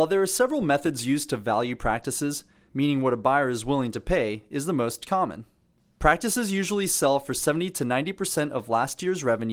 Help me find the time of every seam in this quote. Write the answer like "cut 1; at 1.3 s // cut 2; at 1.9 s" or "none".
cut 1; at 2.7 s